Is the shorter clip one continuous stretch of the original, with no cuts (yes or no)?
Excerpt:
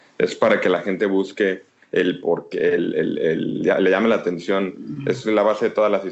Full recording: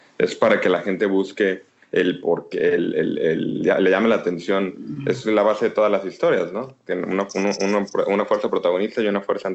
yes